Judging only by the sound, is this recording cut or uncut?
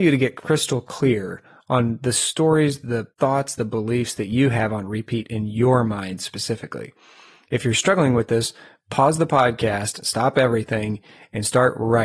uncut